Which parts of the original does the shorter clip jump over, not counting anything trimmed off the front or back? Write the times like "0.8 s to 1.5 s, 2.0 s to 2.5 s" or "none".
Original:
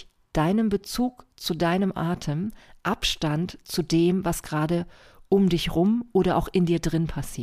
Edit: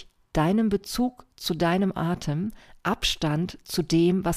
none